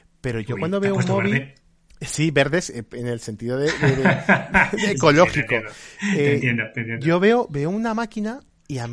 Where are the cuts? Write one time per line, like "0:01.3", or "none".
none